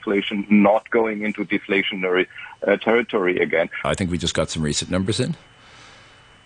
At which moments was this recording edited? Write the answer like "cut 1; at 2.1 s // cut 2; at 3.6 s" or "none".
cut 1; at 3.8 s